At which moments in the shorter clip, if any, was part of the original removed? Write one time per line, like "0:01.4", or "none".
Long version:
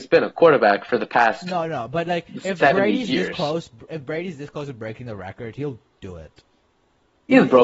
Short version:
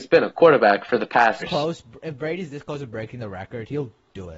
0:01.4

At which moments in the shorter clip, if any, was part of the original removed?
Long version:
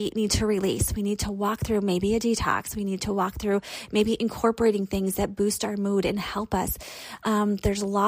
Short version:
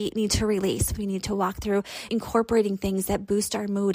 0:00.9
0:02.1

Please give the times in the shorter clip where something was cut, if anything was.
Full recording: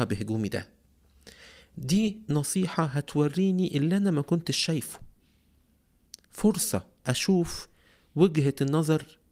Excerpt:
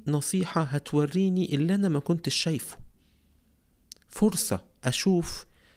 none

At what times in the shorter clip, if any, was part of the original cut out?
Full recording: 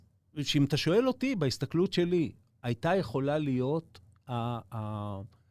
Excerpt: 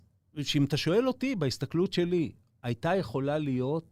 none

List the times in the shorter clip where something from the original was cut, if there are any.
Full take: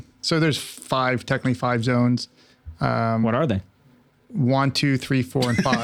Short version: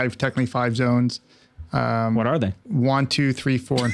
0:02.6

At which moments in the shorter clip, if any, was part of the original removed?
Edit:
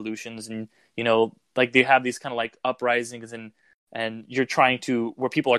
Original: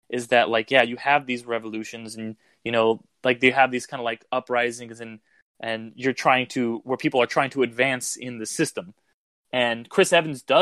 none

